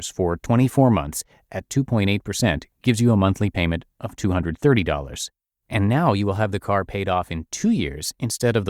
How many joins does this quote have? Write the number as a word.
zero